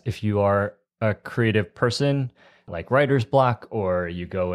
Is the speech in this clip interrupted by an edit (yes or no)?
yes